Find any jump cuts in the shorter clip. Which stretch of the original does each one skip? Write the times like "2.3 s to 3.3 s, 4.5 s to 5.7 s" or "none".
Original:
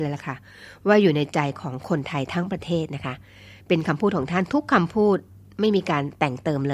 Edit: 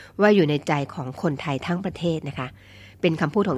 none